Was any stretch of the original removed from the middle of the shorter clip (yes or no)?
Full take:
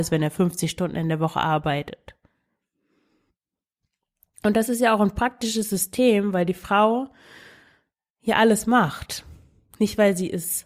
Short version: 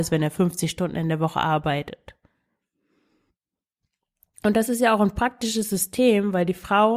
no